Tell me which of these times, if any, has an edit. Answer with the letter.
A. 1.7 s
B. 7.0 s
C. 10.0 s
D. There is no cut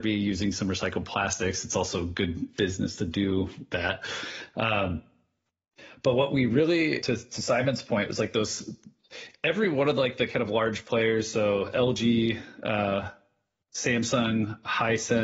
B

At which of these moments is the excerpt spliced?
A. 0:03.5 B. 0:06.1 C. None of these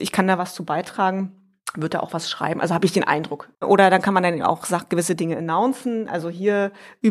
A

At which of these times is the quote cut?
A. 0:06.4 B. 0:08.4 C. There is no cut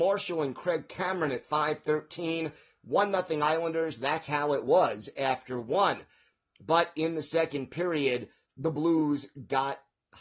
B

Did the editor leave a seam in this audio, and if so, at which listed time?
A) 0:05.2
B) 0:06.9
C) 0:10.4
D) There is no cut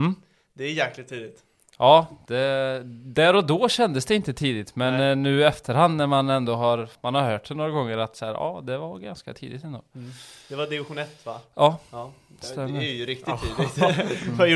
B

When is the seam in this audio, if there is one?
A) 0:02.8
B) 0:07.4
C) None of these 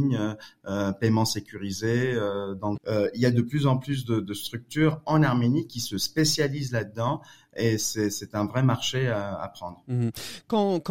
A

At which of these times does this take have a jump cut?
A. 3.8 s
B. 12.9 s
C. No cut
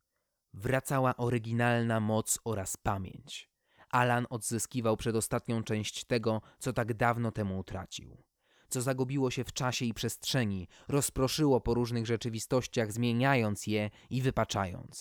C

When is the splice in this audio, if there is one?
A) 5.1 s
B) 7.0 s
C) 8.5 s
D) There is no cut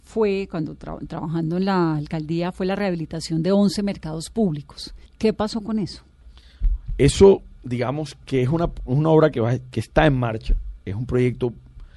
A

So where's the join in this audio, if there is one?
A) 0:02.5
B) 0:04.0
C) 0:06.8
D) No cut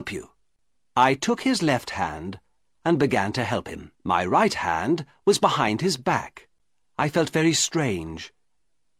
B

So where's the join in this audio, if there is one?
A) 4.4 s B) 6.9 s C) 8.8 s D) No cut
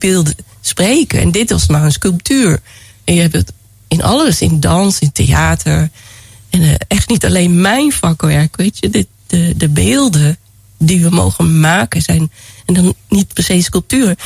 D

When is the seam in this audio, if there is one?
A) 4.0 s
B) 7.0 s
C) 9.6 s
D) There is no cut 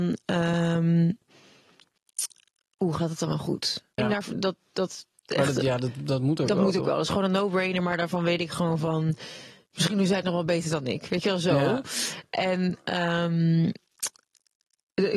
A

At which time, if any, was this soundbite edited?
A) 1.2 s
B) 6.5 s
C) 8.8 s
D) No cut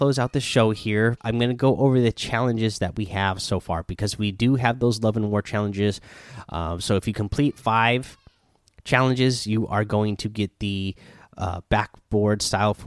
A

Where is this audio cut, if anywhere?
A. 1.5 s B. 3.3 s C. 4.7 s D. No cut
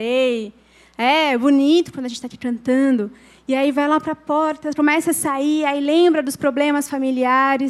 D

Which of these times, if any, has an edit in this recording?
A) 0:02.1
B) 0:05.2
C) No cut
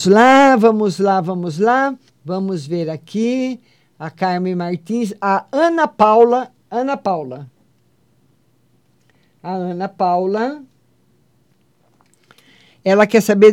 A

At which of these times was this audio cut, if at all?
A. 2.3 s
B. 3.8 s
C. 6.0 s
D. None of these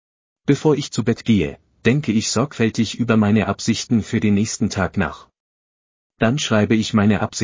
D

